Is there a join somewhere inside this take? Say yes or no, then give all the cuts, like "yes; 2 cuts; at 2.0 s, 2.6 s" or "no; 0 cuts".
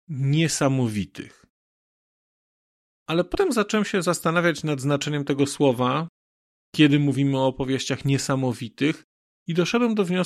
no; 0 cuts